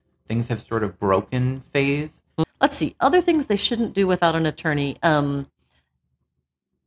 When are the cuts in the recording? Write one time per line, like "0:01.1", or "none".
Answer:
0:02.4